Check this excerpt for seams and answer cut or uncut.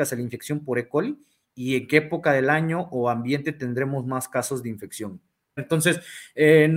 cut